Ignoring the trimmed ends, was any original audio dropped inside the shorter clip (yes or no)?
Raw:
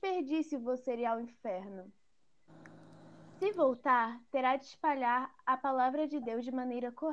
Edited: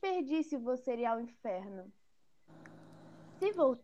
no